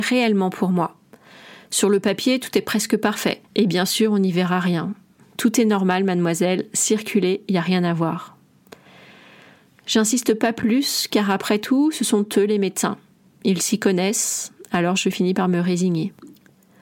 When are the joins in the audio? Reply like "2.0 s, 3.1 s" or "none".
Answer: 3.4 s